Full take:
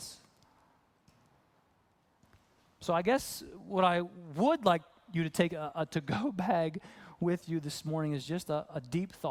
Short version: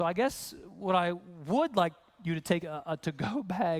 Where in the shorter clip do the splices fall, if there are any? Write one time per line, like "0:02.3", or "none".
none